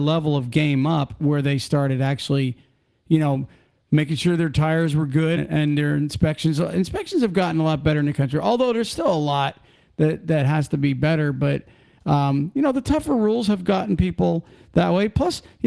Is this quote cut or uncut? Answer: cut